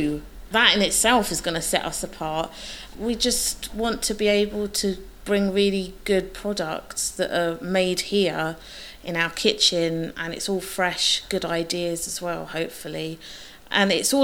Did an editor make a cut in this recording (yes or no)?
no